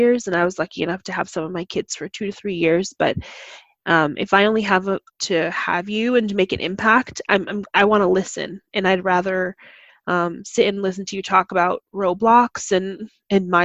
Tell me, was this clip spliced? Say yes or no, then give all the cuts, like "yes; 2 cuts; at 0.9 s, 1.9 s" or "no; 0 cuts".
yes; 1 cut; at 5.1 s